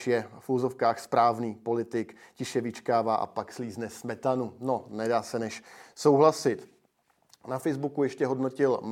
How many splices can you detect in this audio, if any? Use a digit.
0